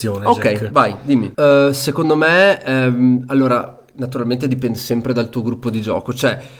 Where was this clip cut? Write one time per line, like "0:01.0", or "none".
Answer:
0:01.3